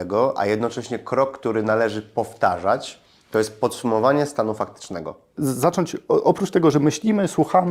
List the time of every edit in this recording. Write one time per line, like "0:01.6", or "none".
0:05.3